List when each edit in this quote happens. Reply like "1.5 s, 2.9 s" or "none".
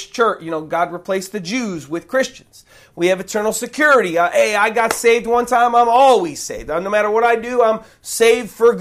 none